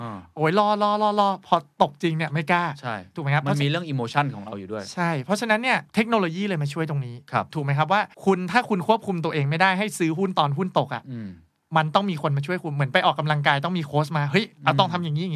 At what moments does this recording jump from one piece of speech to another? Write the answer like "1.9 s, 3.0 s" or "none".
5.9 s, 8.1 s